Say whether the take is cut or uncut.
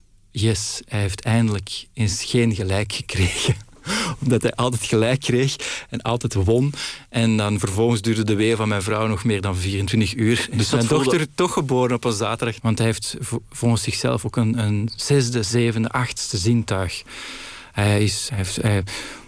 cut